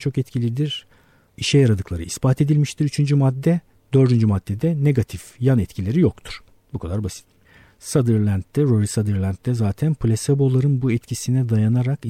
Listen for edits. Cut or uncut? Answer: uncut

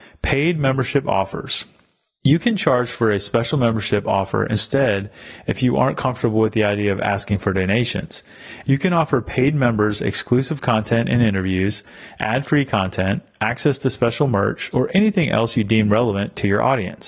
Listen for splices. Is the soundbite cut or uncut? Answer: cut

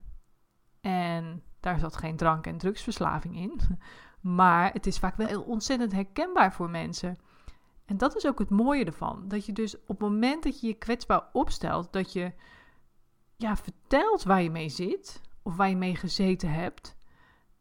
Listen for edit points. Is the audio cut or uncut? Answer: cut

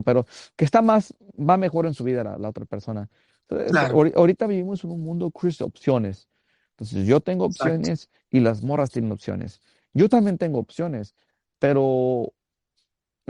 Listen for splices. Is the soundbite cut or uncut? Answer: uncut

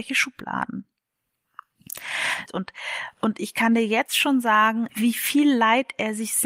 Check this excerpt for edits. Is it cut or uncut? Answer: cut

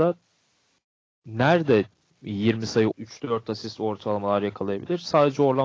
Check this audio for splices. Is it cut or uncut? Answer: cut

